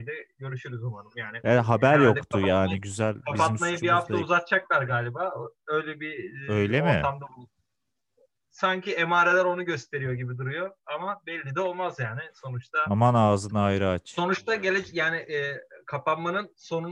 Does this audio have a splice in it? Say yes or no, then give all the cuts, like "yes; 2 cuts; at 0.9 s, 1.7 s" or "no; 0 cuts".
no; 0 cuts